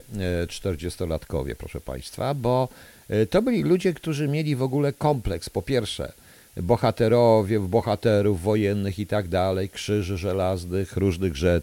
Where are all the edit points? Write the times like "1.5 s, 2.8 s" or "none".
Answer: none